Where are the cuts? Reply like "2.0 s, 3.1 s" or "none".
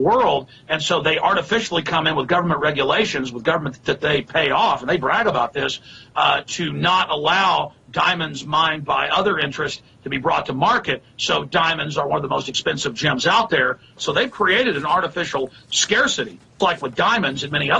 14.0 s, 16.6 s

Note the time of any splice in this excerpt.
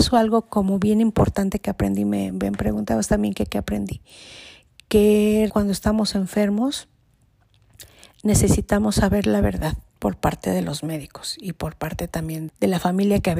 5.5 s, 9.9 s, 12.5 s

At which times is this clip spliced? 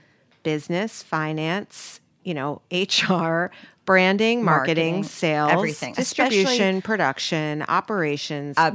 2.2 s

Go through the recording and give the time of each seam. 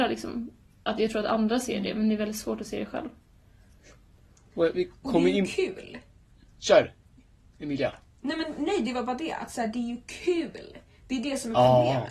none

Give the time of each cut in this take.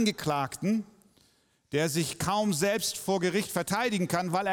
none

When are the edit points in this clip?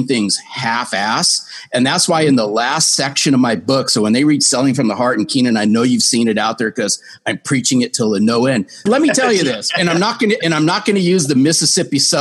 8.9 s

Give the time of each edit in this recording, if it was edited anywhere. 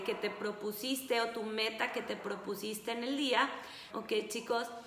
3.9 s

